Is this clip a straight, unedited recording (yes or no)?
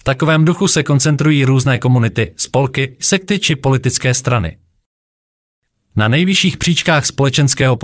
no